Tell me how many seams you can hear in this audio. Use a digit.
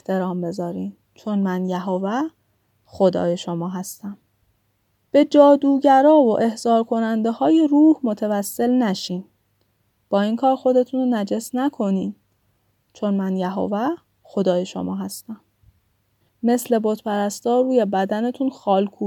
1